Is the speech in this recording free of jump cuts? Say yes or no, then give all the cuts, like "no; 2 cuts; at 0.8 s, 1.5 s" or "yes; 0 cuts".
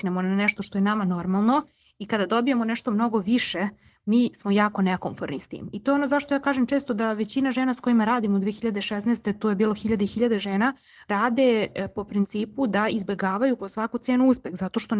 yes; 0 cuts